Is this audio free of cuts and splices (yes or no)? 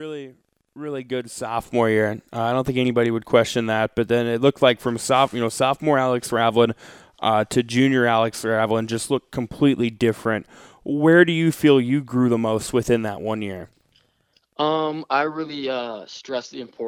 yes